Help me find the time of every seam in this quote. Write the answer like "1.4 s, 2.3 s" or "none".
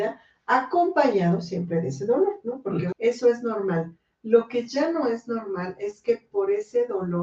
2.9 s

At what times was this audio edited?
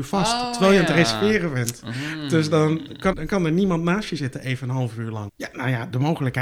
3.1 s, 5.3 s

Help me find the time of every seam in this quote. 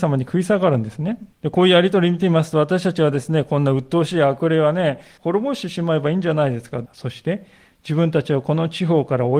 1.3 s, 5.2 s, 6.9 s

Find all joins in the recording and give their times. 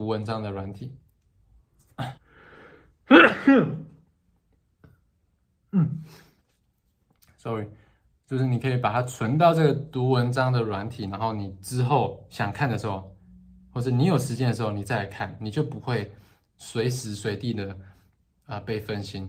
2.2 s

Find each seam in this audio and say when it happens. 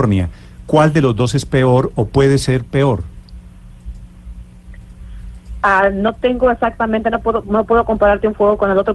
none

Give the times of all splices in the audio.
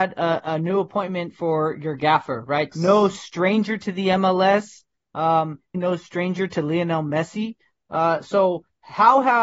2.7 s, 5.7 s

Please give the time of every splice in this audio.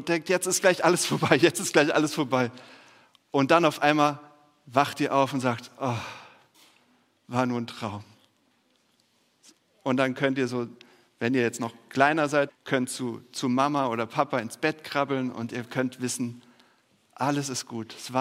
12.5 s

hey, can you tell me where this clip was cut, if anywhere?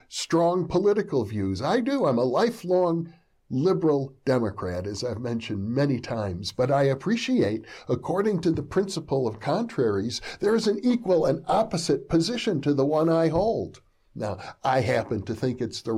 none

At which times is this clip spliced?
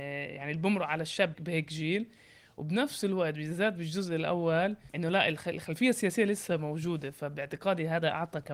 1.4 s

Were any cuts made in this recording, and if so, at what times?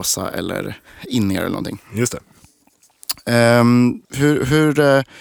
4.0 s

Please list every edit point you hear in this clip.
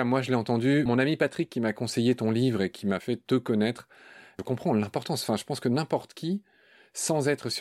none

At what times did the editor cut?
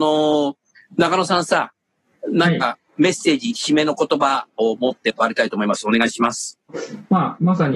none

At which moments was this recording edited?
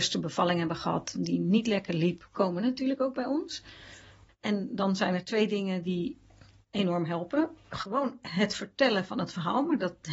none

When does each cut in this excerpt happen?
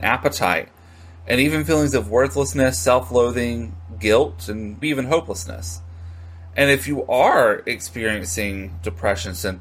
4.8 s

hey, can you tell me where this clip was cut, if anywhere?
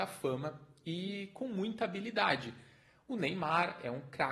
none

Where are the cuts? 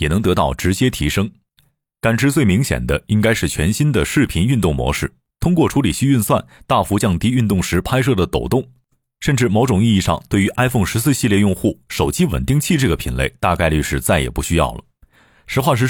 none

